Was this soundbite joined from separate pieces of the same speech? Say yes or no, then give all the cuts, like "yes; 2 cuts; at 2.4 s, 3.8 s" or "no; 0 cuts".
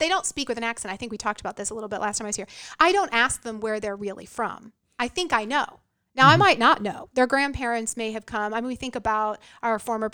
no; 0 cuts